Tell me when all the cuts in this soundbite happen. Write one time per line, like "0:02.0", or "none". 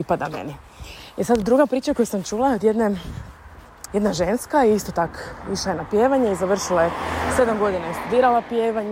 0:03.9